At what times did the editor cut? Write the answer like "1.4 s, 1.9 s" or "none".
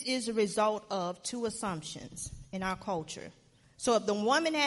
3.6 s

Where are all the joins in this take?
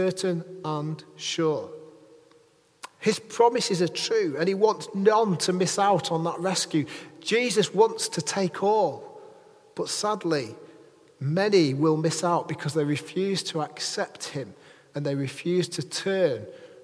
none

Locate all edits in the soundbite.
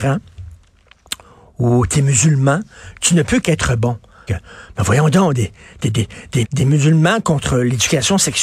4.3 s, 6.4 s

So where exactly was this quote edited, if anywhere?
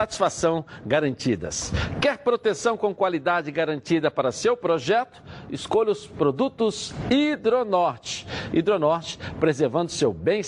none

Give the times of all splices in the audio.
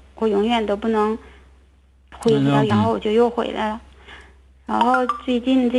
2.7 s

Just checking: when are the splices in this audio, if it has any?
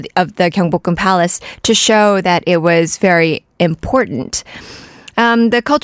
none

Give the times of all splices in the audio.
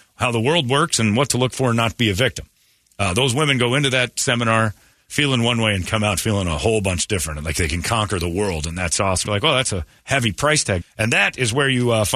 9.3 s, 10.8 s

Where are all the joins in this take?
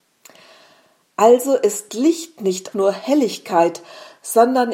2.7 s

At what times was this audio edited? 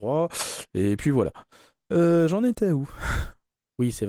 none

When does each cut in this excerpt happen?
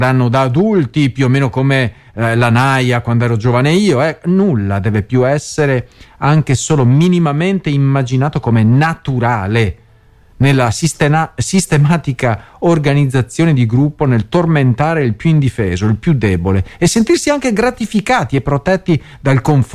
none

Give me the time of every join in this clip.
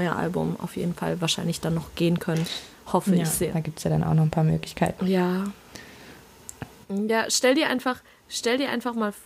3.5 s, 6.8 s

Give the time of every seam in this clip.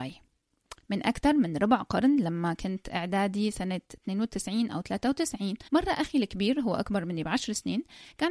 5.7 s

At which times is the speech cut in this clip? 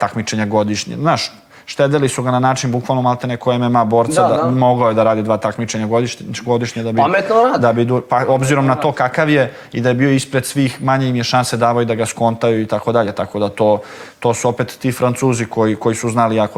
none

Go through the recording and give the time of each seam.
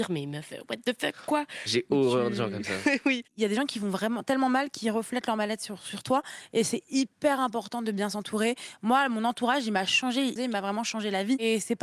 10.4 s

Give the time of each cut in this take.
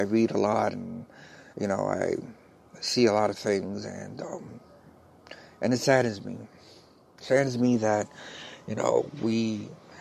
1.5 s

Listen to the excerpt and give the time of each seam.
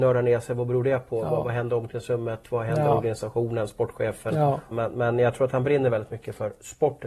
4.7 s

